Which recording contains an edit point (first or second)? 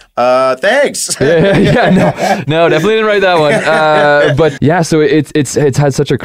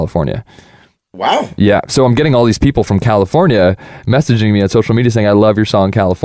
first